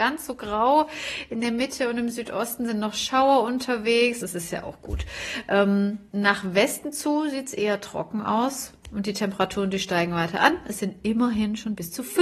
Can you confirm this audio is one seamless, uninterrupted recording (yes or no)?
no